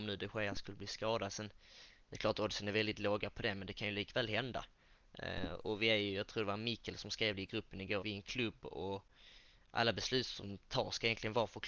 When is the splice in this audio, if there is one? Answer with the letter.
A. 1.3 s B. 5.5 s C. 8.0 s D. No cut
C